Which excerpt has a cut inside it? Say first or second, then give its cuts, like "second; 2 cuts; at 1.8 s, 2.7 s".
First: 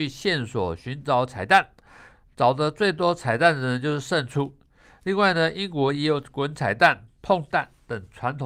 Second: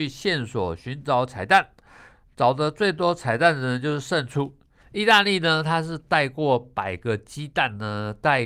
second; 1 cut; at 4.8 s